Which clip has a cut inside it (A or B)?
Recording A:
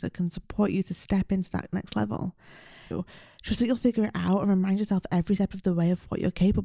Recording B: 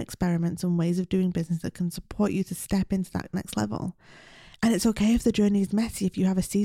A